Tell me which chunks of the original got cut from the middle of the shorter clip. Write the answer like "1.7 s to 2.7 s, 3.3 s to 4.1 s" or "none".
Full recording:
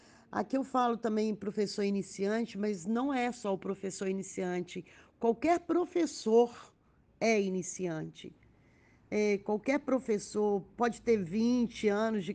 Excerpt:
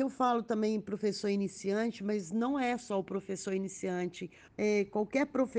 5.0 s to 9.0 s

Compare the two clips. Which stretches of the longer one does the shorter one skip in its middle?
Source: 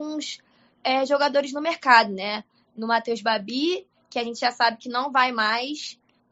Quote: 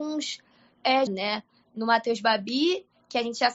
1.1 s to 2.1 s

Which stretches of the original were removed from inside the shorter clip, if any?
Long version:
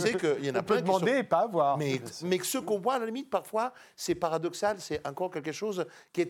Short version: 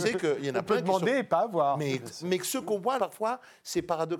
3.0 s to 3.3 s

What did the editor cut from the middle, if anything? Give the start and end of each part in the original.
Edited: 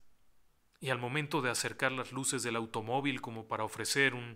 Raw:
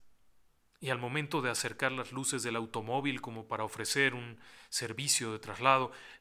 none

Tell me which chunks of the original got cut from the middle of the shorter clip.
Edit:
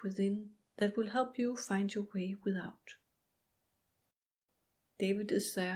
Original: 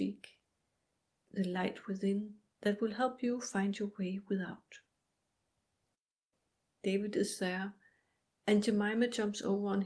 none

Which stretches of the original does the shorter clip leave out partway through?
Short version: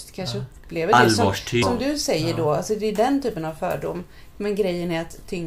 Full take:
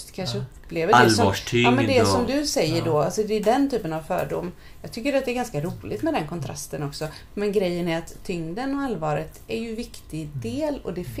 1.6 s to 2.1 s, 4.8 s to 7.3 s

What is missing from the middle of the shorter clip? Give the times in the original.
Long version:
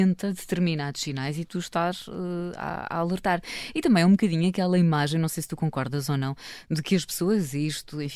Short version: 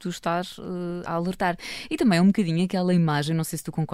2.6 s to 2.9 s

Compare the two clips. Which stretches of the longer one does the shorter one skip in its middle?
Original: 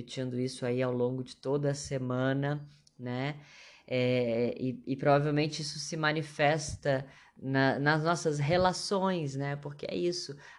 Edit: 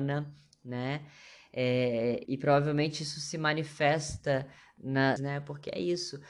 4.6 s to 4.8 s, 7.7 s to 9.3 s

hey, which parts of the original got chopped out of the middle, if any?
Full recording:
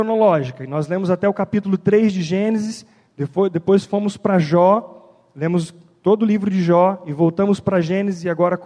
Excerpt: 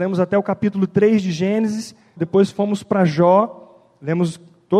3.1 s to 3.5 s

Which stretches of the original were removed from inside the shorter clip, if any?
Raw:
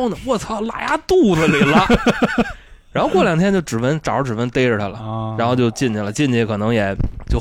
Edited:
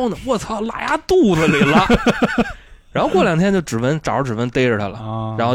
none

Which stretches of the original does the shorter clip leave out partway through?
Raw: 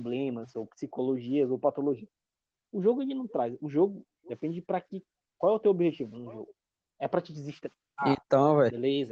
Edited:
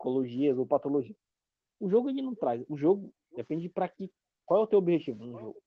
none

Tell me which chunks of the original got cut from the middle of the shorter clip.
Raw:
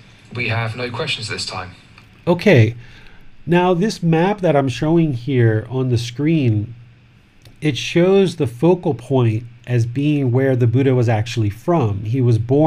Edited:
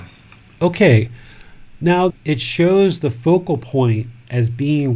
3.8 s to 7.5 s

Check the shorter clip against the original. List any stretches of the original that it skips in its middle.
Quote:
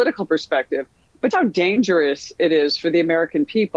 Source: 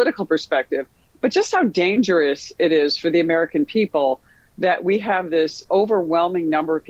1.3 s to 1.5 s

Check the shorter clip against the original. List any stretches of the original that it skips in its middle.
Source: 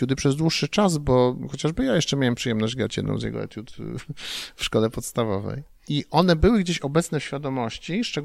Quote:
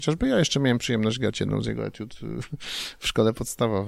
none

